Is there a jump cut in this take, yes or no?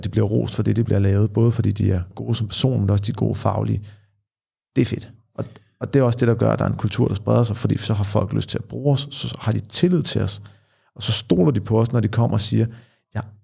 no